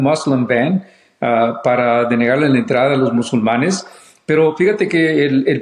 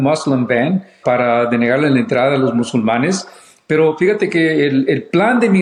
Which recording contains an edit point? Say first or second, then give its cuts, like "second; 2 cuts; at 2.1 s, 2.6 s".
second; 1 cut; at 1.0 s